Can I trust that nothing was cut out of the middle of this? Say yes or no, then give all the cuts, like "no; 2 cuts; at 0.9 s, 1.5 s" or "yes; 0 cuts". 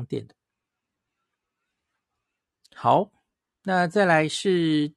yes; 0 cuts